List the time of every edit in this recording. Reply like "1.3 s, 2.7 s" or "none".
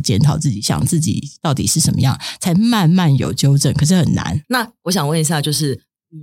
4.4 s